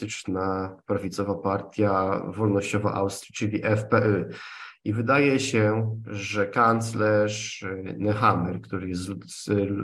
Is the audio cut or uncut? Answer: uncut